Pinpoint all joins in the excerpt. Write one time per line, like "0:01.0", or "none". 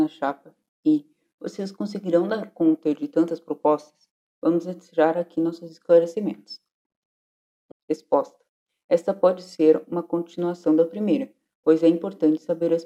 0:07.7